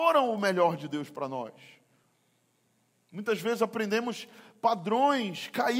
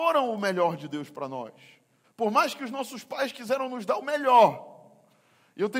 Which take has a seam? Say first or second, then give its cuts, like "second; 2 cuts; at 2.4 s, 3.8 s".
second; 1 cut; at 2.0 s